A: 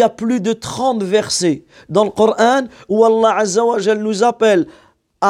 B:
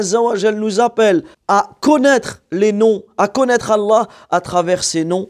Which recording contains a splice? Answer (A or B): B